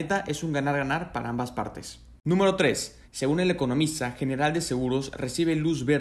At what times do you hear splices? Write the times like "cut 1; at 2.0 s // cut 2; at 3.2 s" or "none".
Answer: cut 1; at 3.0 s